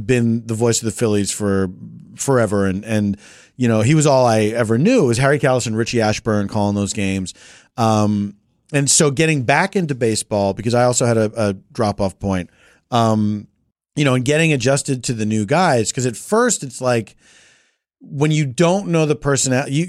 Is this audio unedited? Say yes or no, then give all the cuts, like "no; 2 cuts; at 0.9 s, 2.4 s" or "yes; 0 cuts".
yes; 0 cuts